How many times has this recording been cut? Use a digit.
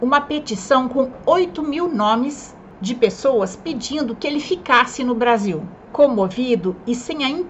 1